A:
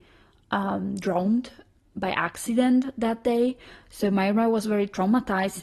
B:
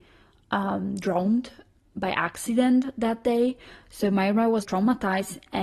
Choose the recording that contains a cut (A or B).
B